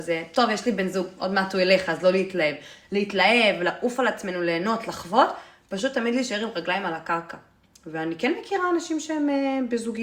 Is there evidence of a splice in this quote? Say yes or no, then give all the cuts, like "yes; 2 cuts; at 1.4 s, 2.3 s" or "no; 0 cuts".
no; 0 cuts